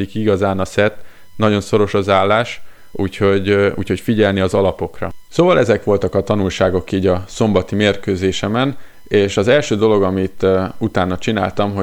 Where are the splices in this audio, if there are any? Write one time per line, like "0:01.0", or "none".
none